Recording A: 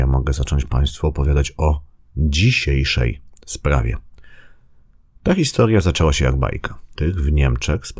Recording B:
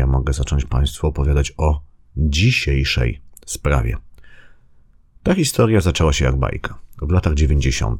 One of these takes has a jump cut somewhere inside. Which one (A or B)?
A